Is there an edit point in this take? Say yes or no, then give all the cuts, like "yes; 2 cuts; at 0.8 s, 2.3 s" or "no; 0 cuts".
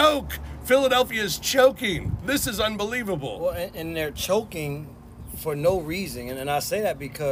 no; 0 cuts